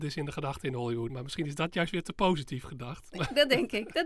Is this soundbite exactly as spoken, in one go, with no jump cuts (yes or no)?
yes